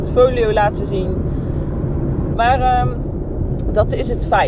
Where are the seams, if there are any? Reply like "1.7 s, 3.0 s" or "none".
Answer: 2.3 s